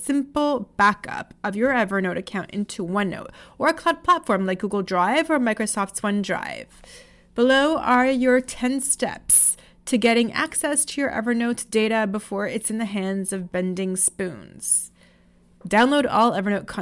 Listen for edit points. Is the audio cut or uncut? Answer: uncut